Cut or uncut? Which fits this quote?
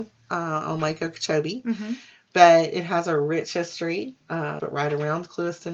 cut